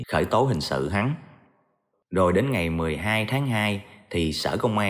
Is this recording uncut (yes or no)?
no